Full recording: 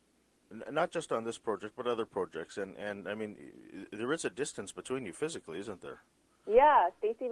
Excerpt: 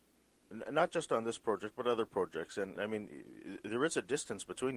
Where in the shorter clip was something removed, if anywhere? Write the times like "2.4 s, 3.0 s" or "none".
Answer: 2.8 s